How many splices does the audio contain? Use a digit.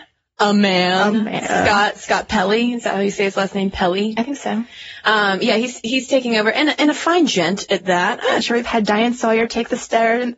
1